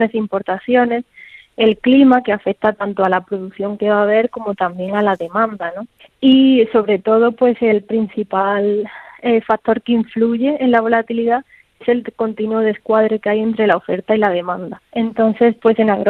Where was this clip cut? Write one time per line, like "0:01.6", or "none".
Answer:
0:14.8